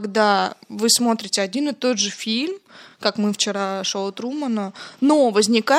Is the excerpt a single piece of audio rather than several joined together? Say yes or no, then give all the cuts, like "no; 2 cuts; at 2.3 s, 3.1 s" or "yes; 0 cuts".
yes; 0 cuts